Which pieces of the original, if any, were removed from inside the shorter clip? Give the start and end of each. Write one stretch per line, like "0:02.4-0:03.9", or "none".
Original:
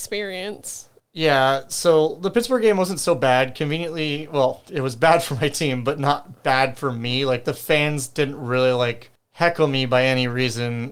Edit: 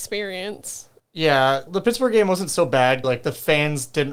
0:01.7-0:02.2
0:03.5-0:07.3

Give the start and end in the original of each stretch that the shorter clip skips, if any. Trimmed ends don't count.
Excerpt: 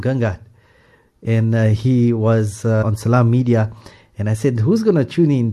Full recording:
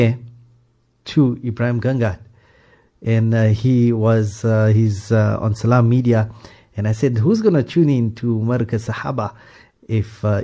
0:04.6-0:05.4

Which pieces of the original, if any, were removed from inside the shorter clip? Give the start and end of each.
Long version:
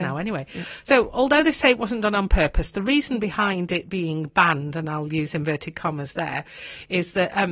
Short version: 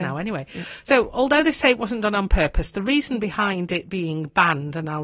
none

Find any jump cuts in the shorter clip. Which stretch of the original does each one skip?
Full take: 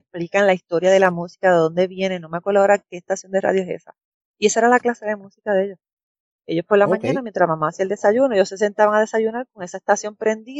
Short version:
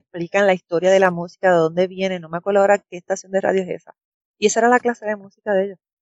none

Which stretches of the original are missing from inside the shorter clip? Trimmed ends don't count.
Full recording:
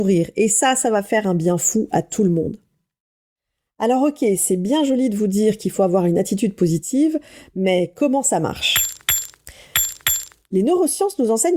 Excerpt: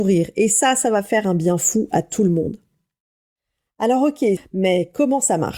0:04.4-0:07.4

